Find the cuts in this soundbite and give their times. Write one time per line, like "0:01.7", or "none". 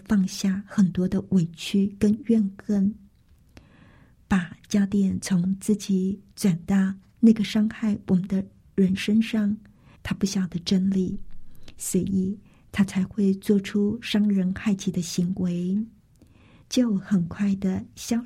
0:09.9
0:16.6